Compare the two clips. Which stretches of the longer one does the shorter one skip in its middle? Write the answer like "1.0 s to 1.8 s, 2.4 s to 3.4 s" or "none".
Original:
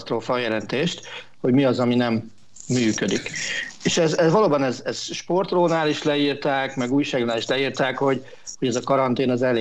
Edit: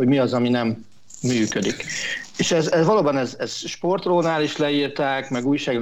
none